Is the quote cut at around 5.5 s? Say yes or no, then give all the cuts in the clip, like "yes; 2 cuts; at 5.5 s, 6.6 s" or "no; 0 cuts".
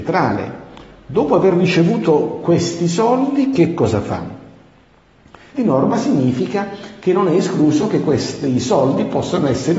yes; 1 cut; at 5.5 s